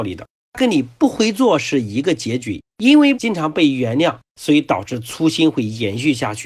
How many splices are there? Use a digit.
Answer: 2